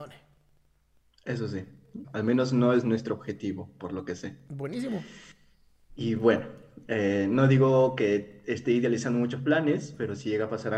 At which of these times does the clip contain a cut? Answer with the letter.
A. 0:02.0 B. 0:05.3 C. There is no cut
A